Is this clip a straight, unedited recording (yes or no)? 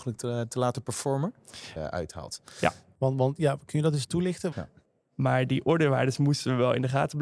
no